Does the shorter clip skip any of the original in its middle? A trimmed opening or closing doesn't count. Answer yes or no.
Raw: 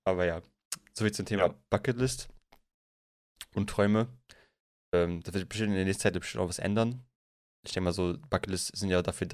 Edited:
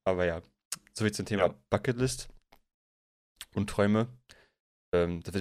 no